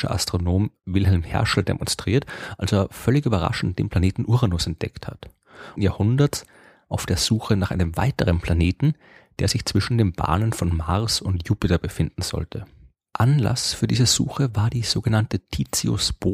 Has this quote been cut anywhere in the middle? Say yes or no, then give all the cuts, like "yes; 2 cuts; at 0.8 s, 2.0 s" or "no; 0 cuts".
yes; 1 cut; at 5.7 s